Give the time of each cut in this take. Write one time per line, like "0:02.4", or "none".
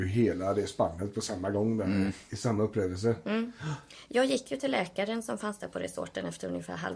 none